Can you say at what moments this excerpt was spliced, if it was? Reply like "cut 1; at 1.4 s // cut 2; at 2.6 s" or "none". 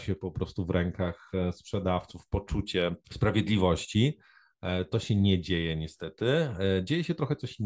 cut 1; at 3.0 s